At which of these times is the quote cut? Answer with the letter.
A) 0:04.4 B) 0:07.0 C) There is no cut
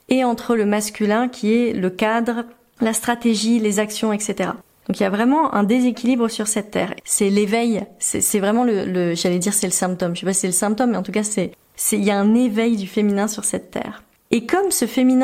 B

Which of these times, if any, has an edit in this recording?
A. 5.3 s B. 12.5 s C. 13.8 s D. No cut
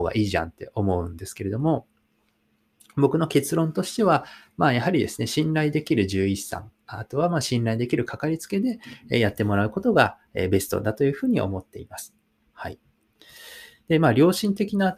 B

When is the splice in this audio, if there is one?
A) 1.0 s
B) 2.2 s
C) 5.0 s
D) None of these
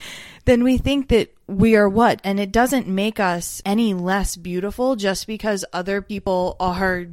B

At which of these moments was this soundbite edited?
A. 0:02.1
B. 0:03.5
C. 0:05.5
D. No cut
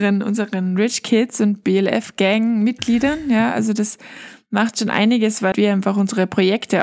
C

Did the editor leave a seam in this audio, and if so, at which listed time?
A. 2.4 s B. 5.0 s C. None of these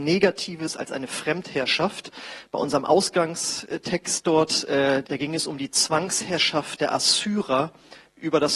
B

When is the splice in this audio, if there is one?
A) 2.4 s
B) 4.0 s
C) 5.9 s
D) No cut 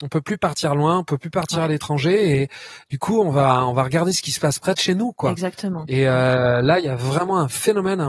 D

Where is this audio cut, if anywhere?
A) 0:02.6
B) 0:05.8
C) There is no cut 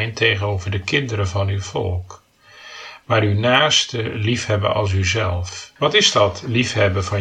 B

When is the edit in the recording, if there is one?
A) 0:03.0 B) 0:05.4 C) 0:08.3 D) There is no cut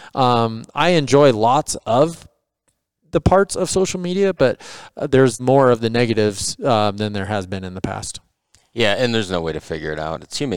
B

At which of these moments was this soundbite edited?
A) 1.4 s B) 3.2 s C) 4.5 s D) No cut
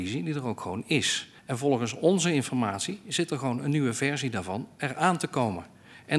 A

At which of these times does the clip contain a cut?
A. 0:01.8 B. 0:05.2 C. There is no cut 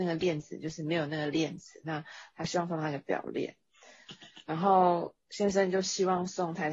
C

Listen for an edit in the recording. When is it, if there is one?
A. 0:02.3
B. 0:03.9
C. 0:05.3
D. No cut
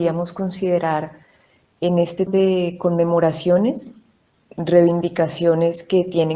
A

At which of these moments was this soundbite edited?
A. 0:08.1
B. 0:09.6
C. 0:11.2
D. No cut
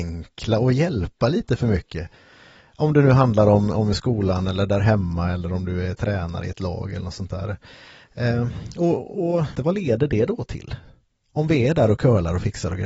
B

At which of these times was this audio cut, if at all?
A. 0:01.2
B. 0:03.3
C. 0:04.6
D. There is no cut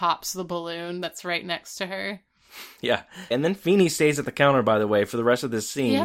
B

